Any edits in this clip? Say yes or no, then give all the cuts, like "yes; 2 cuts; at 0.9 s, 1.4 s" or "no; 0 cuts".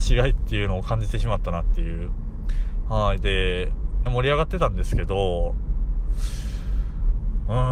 yes; 2 cuts; at 2.8 s, 4.1 s